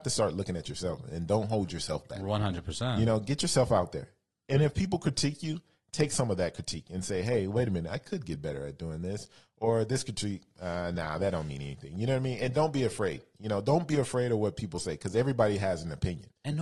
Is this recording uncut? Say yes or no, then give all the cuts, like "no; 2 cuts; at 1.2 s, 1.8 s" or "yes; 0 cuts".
yes; 0 cuts